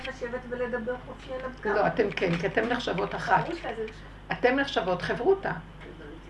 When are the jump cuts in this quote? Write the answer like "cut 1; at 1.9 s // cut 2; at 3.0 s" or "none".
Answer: none